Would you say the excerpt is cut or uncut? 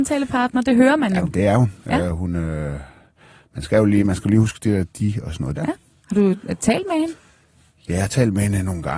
cut